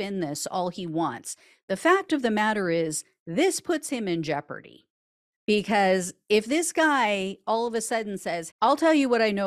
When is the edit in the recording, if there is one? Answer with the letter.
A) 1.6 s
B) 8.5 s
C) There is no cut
B